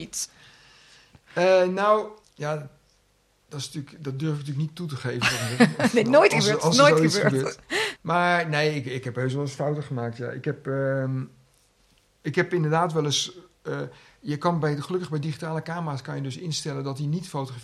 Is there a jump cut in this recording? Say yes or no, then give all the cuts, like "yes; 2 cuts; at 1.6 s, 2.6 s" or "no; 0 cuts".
yes; 2 cuts; at 2.2 s, 8.0 s